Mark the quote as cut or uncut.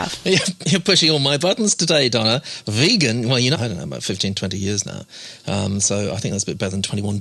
cut